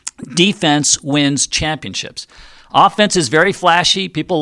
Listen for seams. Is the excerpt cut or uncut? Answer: uncut